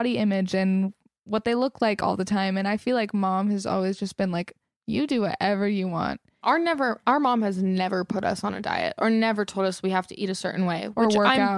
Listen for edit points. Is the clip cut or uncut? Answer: cut